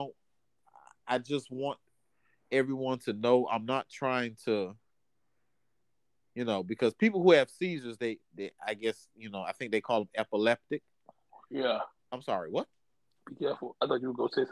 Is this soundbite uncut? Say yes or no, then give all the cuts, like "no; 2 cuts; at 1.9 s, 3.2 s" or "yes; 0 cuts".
no; 1 cut; at 12.0 s